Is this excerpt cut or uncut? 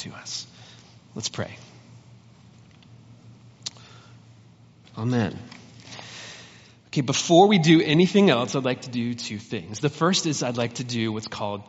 cut